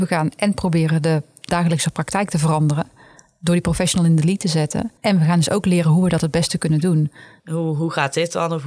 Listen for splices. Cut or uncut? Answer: cut